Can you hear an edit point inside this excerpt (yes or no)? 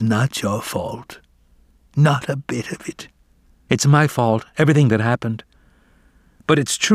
yes